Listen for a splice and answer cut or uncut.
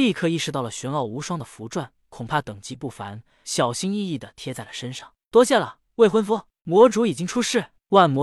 cut